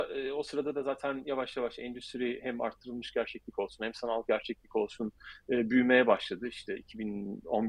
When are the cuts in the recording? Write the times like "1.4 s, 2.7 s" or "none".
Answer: none